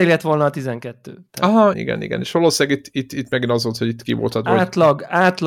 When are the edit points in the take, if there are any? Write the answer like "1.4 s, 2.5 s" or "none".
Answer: 1.7 s